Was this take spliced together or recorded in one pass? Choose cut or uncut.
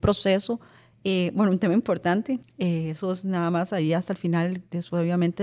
cut